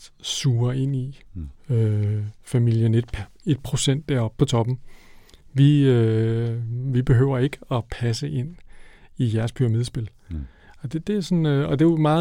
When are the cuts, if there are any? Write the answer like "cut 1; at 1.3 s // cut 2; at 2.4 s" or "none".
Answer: cut 1; at 1.6 s